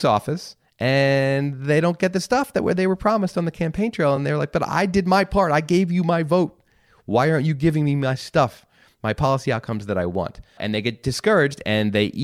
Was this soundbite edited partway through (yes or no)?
no